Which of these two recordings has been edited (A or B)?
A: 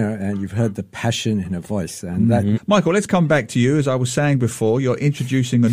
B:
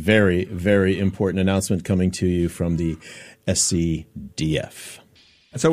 A